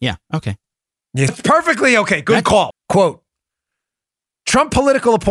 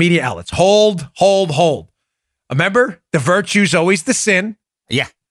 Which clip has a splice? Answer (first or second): first